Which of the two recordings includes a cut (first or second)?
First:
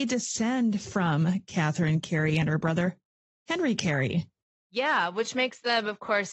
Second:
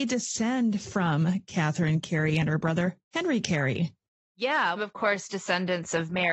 second